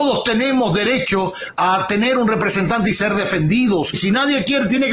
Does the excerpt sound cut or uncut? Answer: cut